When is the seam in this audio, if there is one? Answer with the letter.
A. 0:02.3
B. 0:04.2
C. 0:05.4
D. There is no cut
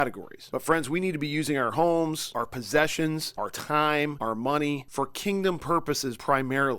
B